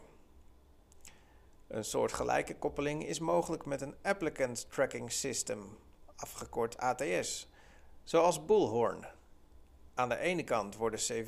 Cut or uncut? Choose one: uncut